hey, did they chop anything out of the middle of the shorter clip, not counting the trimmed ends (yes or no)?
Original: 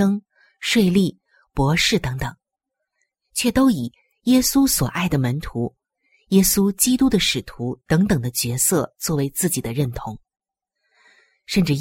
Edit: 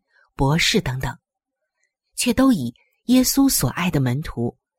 no